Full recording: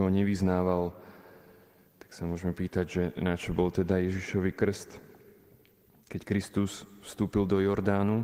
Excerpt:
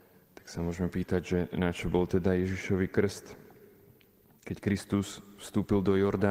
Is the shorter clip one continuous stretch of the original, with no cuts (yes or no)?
yes